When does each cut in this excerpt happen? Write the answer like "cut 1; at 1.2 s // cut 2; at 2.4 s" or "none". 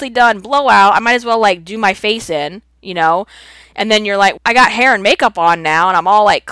cut 1; at 4.4 s